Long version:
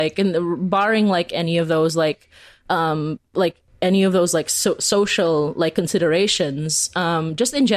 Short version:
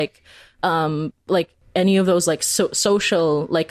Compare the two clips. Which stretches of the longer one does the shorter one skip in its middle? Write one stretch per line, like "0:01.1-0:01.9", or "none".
none